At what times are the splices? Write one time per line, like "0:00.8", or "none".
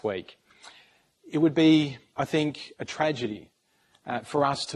0:01.1